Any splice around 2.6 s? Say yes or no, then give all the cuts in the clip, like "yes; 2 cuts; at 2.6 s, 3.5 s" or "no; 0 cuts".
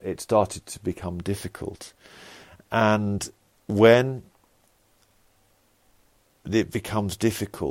no; 0 cuts